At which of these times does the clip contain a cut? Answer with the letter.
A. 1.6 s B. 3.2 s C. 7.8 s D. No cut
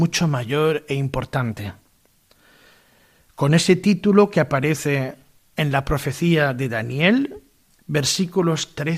C